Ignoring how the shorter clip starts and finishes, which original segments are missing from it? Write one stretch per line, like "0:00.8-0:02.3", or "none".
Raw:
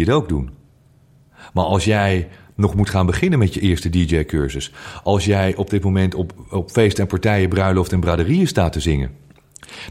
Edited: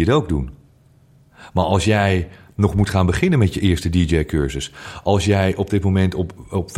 none

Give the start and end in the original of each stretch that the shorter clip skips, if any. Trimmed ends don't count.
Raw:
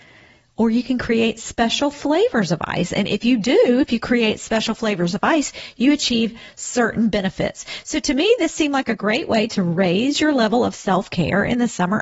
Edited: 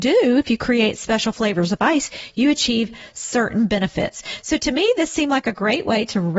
none

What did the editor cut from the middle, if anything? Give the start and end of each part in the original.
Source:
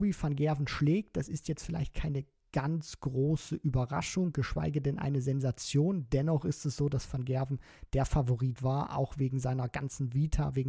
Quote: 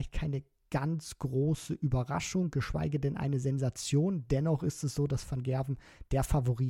none

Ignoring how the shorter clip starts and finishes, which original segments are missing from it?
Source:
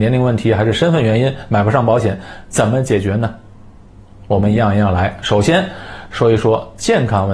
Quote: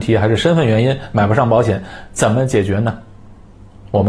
none

